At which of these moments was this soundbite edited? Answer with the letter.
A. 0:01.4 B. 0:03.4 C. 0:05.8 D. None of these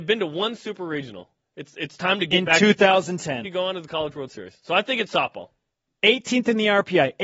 B